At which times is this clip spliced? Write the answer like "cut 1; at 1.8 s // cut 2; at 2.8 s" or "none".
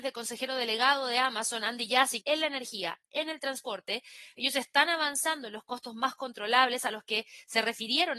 cut 1; at 2.2 s